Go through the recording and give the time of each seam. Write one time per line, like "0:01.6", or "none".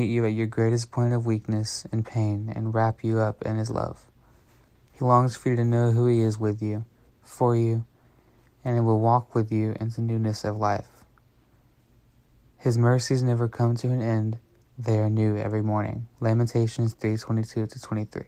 0:16.1